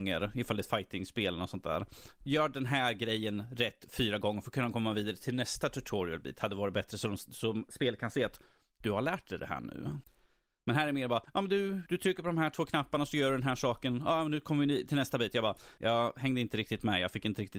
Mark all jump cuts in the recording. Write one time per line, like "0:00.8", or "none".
none